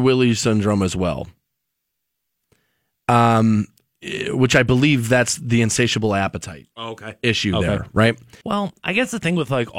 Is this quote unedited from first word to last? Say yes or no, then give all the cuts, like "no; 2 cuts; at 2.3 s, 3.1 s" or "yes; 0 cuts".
no; 2 cuts; at 6.7 s, 8.4 s